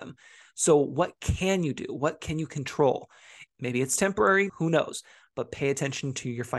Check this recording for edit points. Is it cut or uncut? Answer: cut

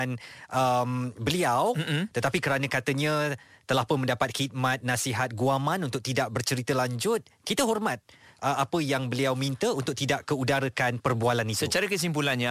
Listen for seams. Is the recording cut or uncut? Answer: uncut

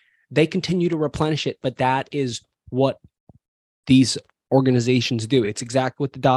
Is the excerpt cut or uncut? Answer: uncut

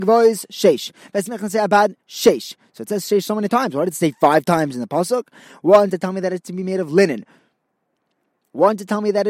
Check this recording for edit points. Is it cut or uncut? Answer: uncut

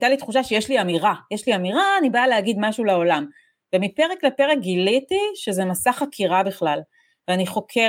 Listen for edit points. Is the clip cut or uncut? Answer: uncut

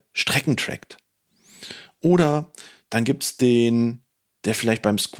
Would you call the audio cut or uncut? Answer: uncut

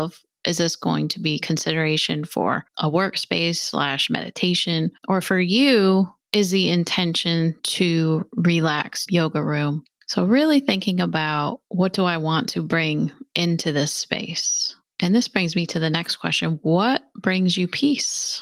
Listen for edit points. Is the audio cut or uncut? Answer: cut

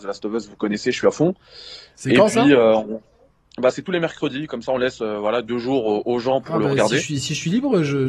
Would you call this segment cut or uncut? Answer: uncut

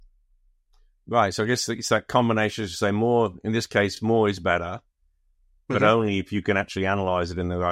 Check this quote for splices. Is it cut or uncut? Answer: uncut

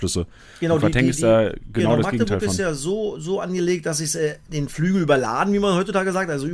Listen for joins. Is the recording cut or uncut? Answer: uncut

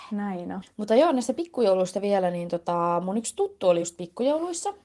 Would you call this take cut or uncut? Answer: uncut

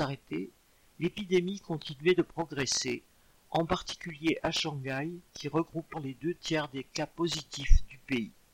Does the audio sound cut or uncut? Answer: cut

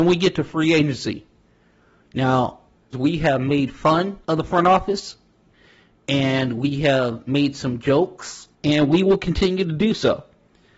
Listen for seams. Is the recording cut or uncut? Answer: cut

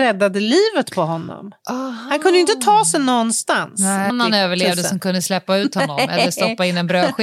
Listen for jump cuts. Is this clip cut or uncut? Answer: cut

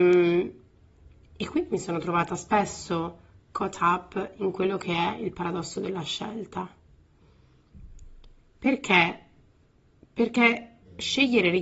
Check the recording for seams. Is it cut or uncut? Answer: uncut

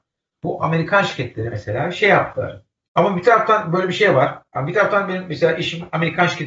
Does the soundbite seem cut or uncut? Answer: cut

